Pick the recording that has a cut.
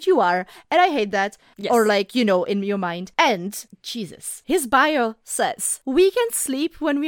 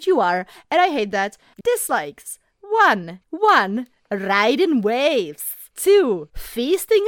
second; 2 cuts; at 1.6 s, 3.2 s

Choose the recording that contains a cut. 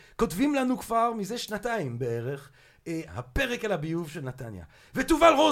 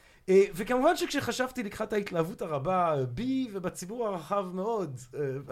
first; 1 cut; at 3.1 s

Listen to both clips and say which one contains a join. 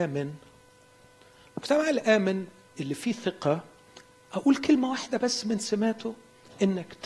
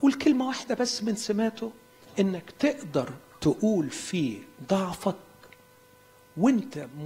first; 1 cut; at 2.8 s

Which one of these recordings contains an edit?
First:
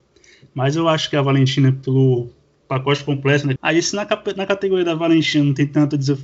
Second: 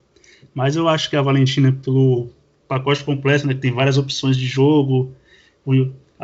first; 1 cut; at 3.6 s

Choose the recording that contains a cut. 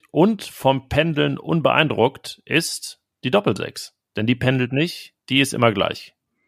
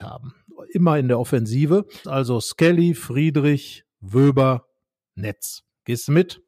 second; 1 cut; at 2.0 s

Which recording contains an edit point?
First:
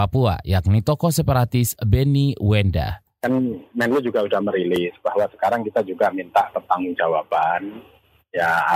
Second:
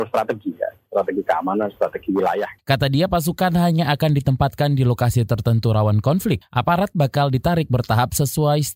second; 1 cut; at 2.6 s

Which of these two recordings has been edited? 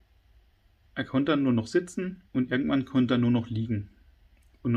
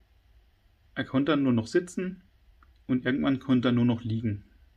first; 1 cut; at 2.3 s

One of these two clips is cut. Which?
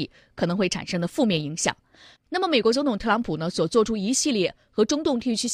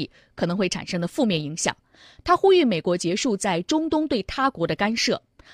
first; 1 cut; at 2.2 s

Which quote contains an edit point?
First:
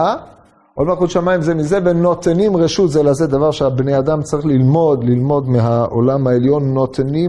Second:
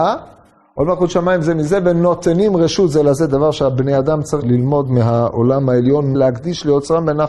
second; 2 cuts; at 4.4 s, 6.1 s

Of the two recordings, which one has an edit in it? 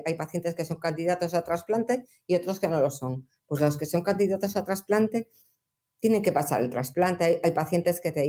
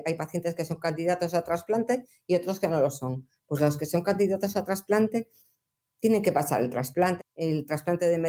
second; 1 cut; at 7.2 s

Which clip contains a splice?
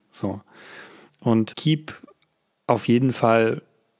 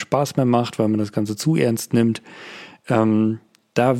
first; 1 cut; at 1.5 s

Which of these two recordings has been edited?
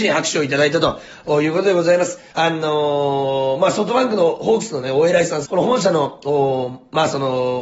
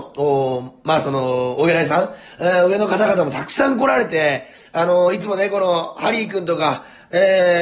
first; 2 cuts; at 2.3 s, 5.5 s

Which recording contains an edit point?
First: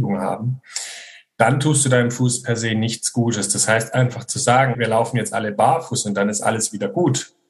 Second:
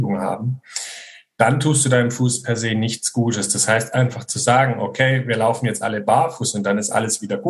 first; 1 cut; at 4.7 s

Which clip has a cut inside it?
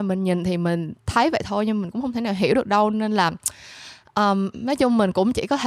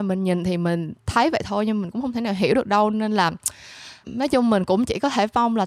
second; 1 cut; at 4.0 s

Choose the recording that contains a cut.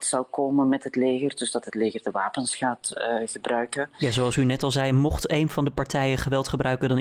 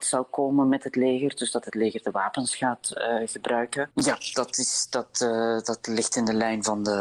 second; 1 cut; at 3.9 s

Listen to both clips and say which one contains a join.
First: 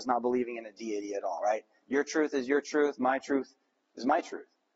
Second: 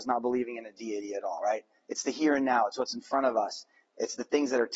first; 1 cut; at 1.8 s

